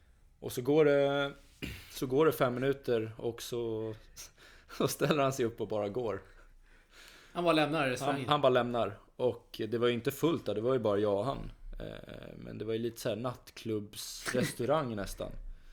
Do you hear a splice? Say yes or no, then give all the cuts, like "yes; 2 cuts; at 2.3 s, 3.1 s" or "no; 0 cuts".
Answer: no; 0 cuts